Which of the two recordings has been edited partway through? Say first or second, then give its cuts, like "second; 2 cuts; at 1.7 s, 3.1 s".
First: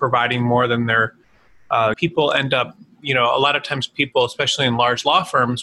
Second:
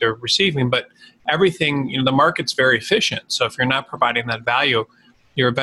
first; 1 cut; at 1.9 s